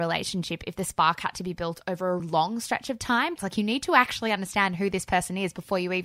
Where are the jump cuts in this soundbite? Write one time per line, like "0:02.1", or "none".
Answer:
0:02.2
0:03.4